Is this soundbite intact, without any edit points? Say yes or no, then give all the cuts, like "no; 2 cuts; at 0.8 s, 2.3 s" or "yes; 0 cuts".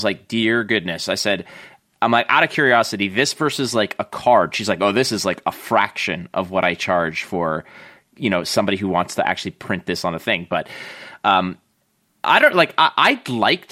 yes; 0 cuts